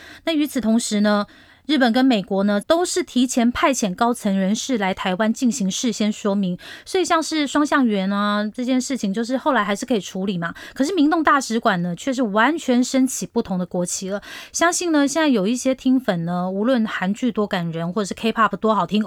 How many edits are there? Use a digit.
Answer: 1